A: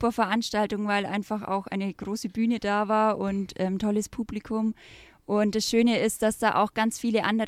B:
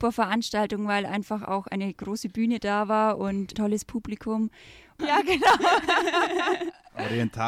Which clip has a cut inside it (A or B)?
B